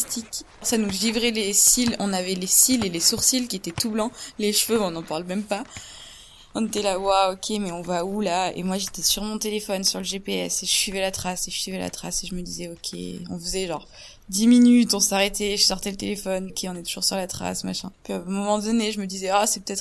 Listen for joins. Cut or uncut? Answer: cut